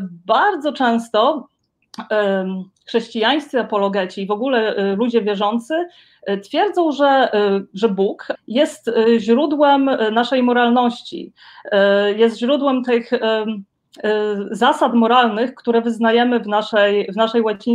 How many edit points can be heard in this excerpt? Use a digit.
1